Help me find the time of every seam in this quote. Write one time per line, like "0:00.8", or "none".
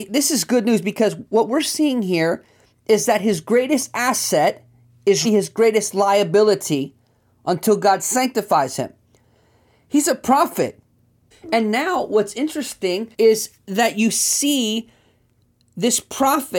0:05.2
0:11.3
0:13.1